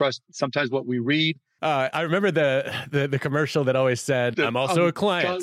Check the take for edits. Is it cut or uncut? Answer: cut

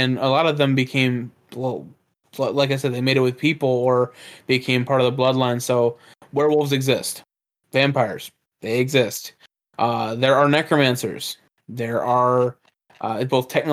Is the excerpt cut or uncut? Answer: uncut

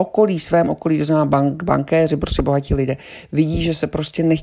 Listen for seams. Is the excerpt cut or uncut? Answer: uncut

